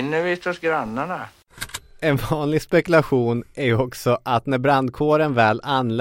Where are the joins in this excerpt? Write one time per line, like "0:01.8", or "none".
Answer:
none